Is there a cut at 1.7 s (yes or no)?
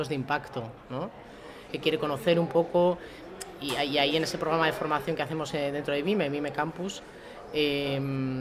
yes